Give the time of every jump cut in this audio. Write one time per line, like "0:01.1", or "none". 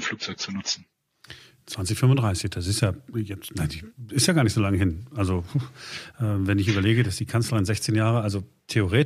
none